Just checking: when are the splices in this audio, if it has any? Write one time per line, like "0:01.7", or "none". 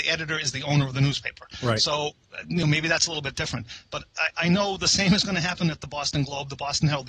none